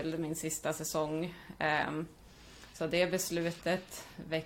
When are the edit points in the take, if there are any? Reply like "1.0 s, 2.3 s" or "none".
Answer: none